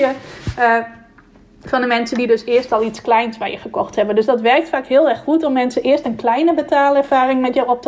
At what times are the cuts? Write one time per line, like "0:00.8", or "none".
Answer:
none